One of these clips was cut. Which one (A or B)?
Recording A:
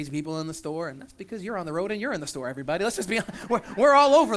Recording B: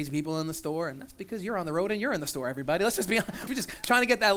B